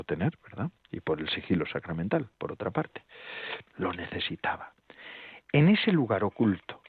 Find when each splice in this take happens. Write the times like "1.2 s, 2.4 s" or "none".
3.7 s